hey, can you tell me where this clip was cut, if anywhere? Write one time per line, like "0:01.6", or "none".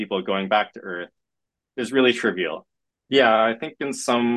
0:02.9